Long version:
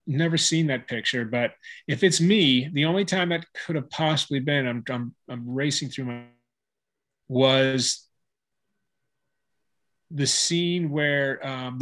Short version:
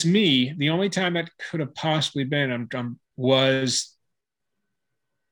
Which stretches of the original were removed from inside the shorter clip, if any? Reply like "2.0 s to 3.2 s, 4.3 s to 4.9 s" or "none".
5.2 s to 7.1 s